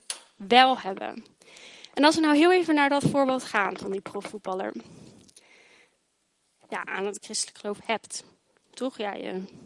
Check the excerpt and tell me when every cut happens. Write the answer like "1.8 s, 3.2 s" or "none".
6.6 s